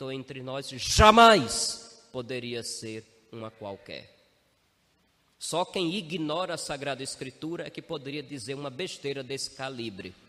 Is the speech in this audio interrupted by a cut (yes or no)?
no